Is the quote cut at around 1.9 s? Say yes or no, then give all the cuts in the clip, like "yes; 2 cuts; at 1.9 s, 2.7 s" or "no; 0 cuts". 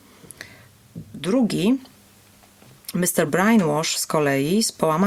no; 1 cut; at 3.3 s